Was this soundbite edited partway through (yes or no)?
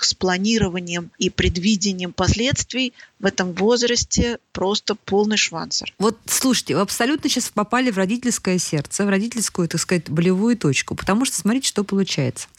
no